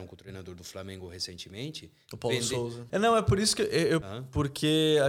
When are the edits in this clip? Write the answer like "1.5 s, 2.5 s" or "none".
2.9 s, 4.0 s